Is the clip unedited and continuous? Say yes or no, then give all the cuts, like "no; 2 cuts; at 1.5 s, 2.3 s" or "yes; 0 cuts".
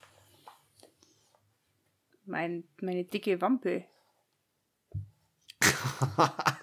yes; 0 cuts